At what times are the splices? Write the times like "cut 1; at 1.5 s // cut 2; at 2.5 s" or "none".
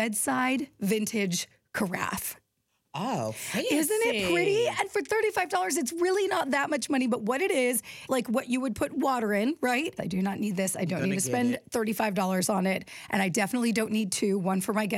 cut 1; at 8.1 s // cut 2; at 10.0 s